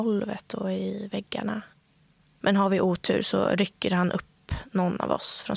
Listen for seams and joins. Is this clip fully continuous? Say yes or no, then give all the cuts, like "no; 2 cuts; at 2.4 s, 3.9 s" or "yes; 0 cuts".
yes; 0 cuts